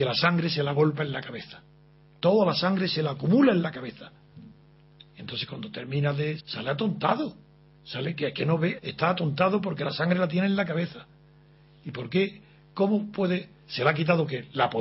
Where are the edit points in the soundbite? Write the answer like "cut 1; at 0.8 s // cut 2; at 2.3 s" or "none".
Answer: cut 1; at 6.4 s // cut 2; at 8.8 s